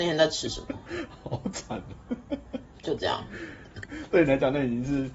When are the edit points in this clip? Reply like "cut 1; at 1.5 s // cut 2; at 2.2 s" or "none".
cut 1; at 3.8 s